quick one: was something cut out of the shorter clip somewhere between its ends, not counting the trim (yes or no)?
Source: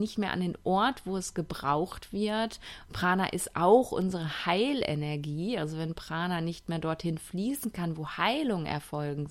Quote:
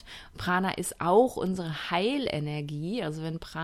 no